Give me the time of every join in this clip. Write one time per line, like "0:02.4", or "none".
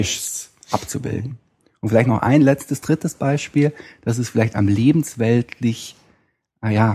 none